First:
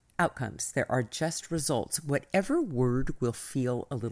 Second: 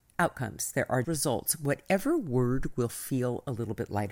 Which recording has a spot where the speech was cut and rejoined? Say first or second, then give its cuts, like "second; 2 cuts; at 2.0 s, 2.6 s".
second; 1 cut; at 1.0 s